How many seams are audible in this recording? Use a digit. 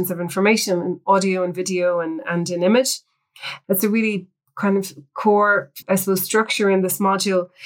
2